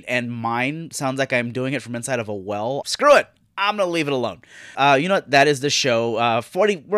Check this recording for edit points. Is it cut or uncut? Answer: cut